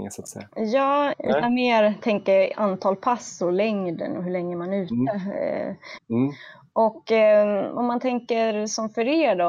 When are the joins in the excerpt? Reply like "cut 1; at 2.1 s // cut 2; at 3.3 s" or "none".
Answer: cut 1; at 1.1 s // cut 2; at 6.0 s